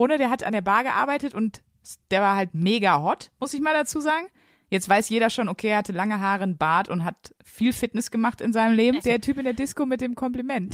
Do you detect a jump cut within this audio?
yes; 1 cut; at 9.0 s

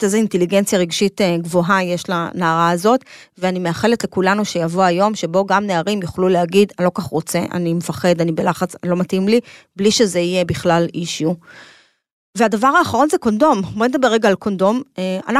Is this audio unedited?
yes; 0 cuts

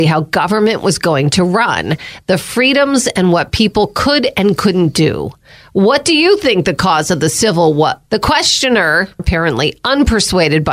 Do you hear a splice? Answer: yes; 2 cuts; at 8.1 s, 9.2 s

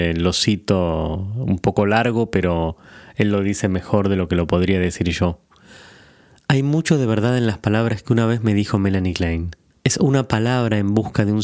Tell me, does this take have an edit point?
yes; 1 cut; at 9.7 s

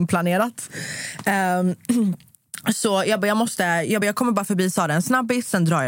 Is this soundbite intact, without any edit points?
yes; 0 cuts

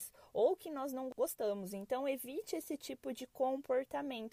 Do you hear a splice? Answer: no; 0 cuts

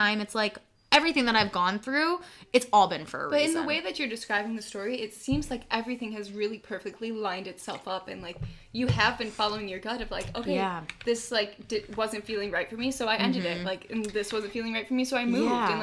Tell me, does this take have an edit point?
no; 0 cuts

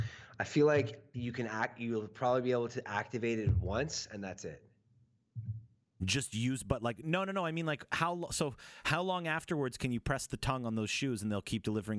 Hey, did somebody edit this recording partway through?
no; 0 cuts

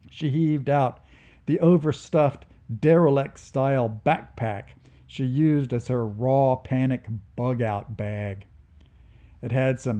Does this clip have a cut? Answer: no; 0 cuts

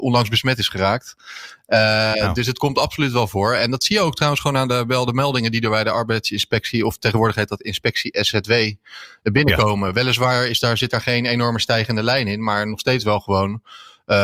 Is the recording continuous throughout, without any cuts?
yes; 0 cuts

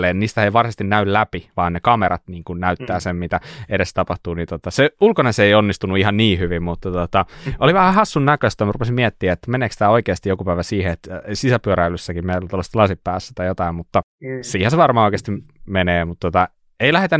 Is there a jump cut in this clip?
no; 0 cuts

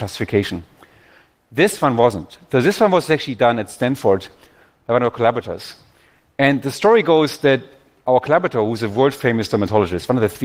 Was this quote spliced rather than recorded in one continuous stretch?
no; 0 cuts

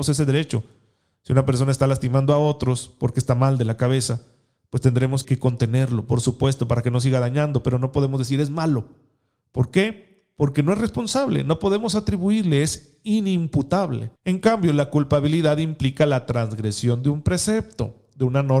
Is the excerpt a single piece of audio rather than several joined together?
no; 2 cuts; at 5.2 s, 14.2 s

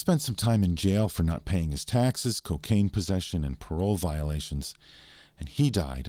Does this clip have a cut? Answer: no; 0 cuts

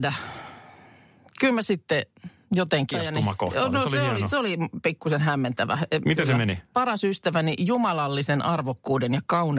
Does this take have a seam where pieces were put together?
yes; 2 cuts; at 2.9 s, 6.0 s

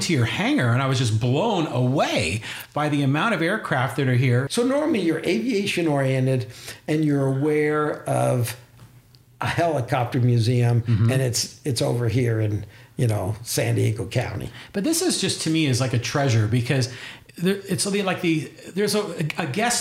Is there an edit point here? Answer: yes; 1 cut; at 4.5 s

